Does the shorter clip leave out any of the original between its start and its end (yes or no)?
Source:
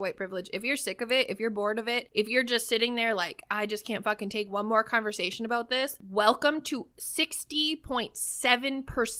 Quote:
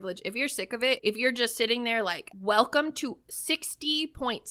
yes